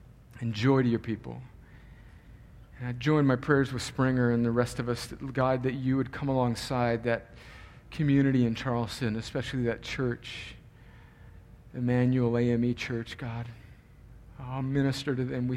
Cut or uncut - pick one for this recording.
uncut